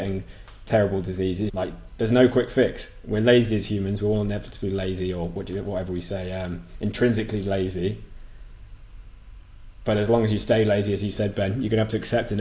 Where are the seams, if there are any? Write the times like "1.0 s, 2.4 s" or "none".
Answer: 1.5 s